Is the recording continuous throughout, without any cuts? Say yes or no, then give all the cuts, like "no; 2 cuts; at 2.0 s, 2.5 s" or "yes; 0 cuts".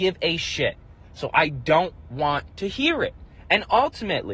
no; 1 cut; at 1.0 s